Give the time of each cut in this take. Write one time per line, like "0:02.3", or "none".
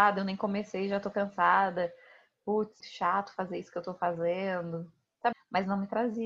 0:02.8
0:05.3